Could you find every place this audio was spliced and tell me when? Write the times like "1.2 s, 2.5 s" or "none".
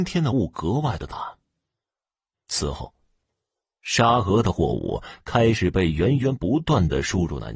2.3 s